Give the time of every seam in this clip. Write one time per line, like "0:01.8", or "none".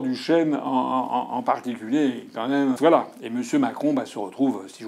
0:02.8